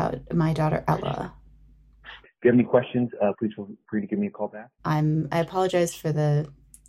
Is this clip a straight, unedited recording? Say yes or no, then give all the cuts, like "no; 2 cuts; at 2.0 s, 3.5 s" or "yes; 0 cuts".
no; 2 cuts; at 2.2 s, 4.8 s